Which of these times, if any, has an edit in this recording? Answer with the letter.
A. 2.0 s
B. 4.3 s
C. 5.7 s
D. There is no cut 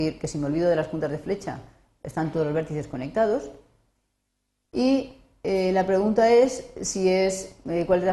D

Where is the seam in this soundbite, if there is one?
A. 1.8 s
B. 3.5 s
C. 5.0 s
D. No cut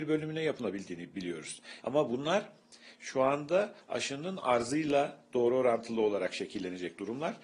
A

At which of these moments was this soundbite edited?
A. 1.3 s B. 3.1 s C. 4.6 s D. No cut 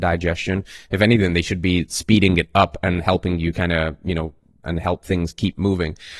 C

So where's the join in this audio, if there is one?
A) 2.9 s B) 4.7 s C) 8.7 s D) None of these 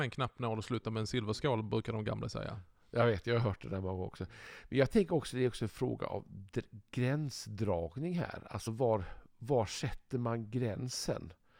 D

